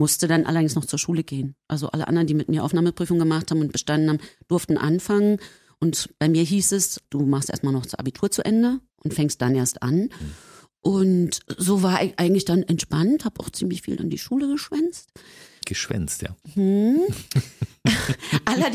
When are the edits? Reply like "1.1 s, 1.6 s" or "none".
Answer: 7.0 s